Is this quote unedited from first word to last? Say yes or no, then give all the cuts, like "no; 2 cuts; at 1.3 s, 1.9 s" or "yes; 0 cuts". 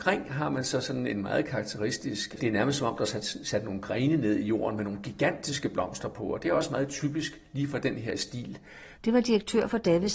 no; 2 cuts; at 2.4 s, 9.0 s